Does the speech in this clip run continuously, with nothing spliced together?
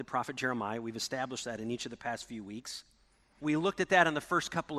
no; 1 cut; at 3.4 s

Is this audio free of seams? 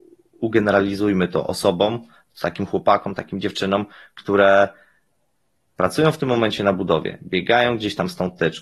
yes; 0 cuts

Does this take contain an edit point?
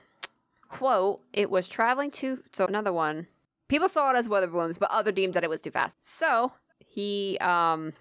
yes; 2 cuts; at 2.7 s, 5.9 s

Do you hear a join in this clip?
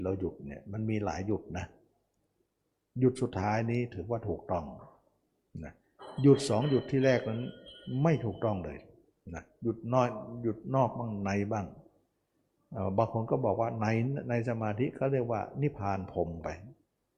no; 0 cuts

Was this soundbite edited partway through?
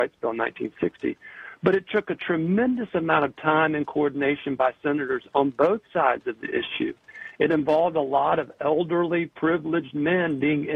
no; 0 cuts

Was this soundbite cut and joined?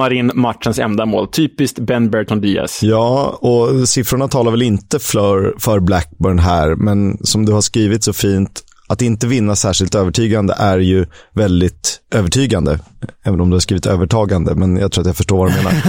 no; 0 cuts

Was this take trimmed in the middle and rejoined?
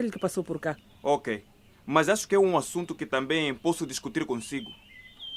no; 0 cuts

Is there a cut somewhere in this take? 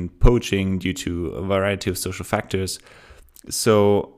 no; 0 cuts

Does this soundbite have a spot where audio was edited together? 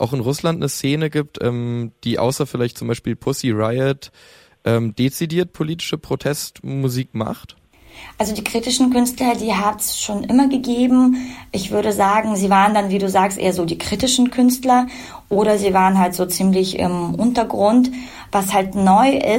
no; 0 cuts

